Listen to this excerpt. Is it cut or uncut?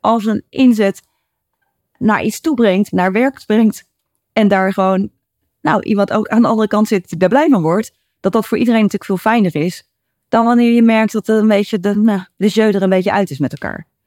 uncut